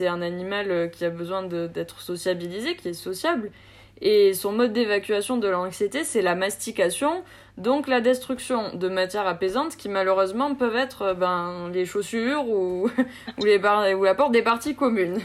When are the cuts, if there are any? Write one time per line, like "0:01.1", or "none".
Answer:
none